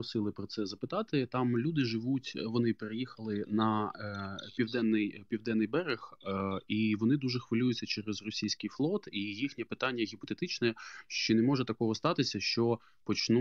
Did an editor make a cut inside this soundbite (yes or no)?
no